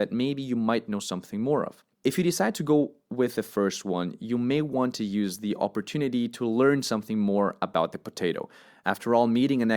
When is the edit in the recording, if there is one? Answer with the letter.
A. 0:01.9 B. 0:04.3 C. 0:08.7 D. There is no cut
A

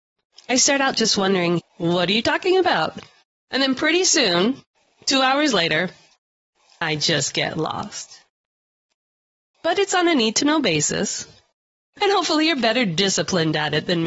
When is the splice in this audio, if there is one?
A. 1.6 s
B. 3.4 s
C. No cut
A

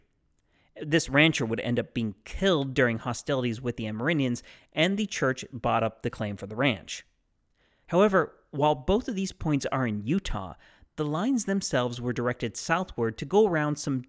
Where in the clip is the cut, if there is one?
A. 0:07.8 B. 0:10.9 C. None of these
A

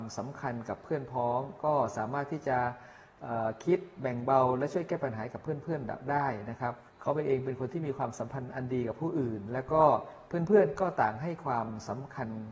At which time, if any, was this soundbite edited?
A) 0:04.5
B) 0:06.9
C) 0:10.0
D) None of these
B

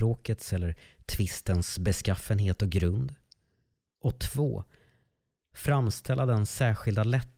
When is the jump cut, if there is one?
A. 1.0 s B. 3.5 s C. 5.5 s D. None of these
D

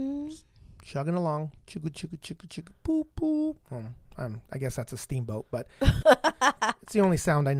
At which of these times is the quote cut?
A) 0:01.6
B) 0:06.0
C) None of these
B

